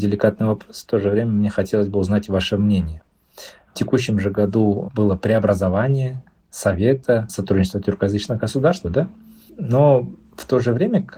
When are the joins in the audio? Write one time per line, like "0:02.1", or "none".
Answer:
0:03.7
0:08.8

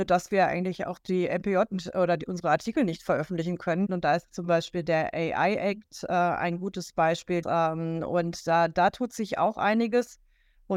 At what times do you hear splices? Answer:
0:03.9
0:07.4

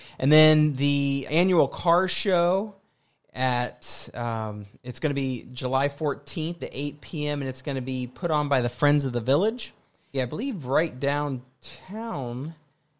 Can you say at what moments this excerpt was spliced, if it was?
0:01.3
0:06.6
0:10.1

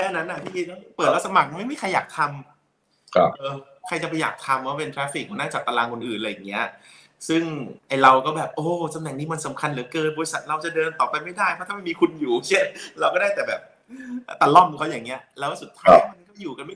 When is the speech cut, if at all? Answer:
0:03.3
0:07.8

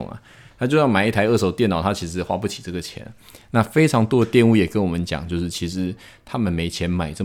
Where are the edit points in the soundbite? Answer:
none

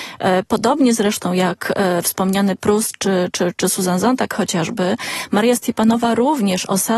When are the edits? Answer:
none

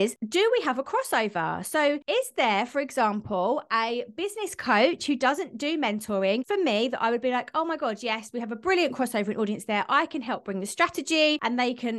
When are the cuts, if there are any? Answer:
none

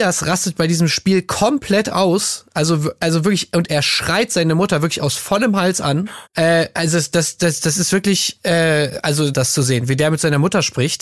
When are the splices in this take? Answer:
0:06.3
0:09.3

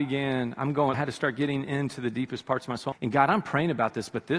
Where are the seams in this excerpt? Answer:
0:00.9
0:02.9

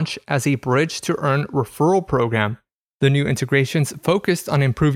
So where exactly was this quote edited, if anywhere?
0:02.9

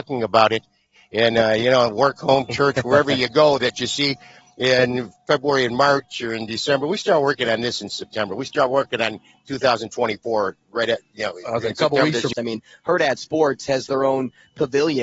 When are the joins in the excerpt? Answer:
0:12.3

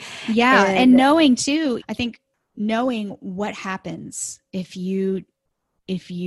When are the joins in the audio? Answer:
0:01.8

